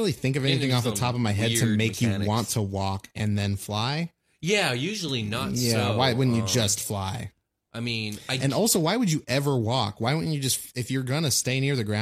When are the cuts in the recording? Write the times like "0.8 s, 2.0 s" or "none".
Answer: none